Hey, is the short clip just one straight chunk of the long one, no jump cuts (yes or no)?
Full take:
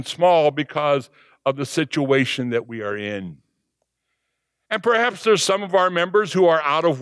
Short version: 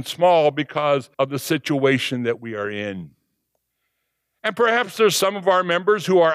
no